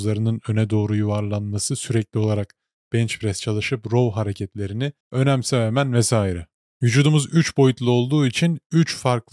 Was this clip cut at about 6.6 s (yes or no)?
no